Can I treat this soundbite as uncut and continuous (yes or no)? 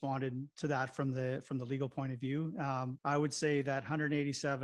no